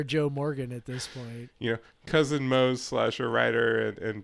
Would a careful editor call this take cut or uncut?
cut